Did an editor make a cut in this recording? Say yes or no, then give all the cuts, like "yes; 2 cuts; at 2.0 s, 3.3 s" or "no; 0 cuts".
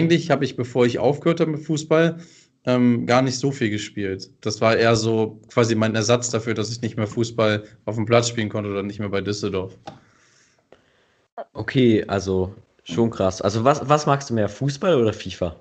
no; 0 cuts